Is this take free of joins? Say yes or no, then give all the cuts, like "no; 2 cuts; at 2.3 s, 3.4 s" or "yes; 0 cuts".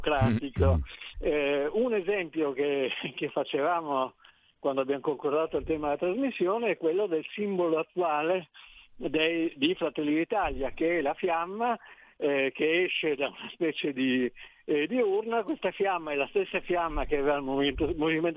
no; 1 cut; at 1.1 s